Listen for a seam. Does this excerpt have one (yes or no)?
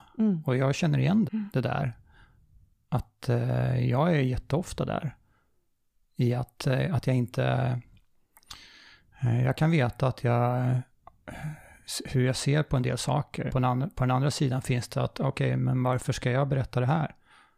yes